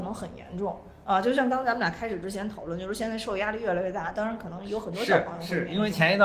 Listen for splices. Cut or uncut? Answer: uncut